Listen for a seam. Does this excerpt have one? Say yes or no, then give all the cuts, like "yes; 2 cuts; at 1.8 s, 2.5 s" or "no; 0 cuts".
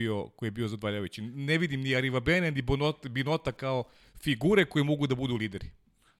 no; 0 cuts